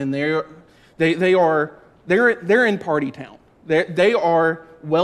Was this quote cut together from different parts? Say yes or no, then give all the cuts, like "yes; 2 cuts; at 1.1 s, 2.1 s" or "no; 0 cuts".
no; 0 cuts